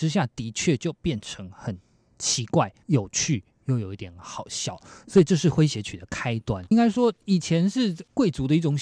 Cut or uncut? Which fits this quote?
cut